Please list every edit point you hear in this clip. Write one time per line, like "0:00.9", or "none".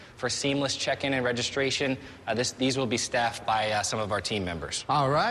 none